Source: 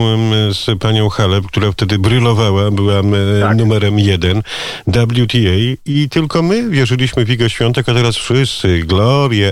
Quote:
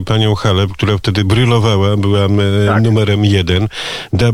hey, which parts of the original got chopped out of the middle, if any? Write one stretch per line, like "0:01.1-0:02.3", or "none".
none